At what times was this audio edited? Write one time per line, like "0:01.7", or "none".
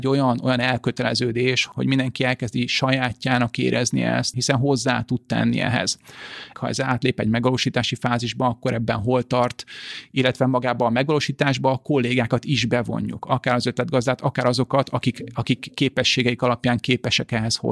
0:04.3
0:06.5